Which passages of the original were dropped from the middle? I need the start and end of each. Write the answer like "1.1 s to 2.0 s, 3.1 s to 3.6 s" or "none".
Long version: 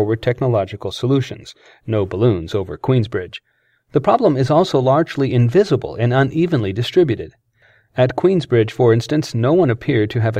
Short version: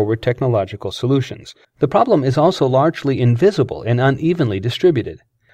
1.6 s to 3.8 s